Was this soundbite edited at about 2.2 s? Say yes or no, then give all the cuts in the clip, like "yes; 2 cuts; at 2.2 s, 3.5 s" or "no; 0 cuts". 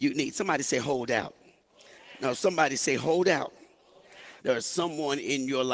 no; 1 cut; at 4.4 s